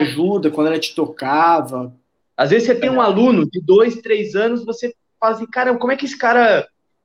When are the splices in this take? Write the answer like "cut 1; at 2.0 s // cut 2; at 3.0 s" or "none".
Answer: cut 1; at 2.2 s